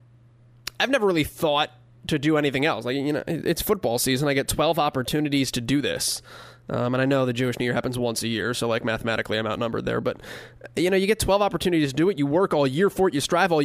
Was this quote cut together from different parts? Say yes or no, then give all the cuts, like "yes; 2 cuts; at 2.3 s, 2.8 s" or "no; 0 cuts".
no; 0 cuts